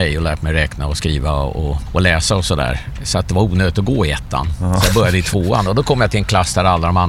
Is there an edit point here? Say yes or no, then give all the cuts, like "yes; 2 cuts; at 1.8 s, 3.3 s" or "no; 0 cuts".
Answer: no; 0 cuts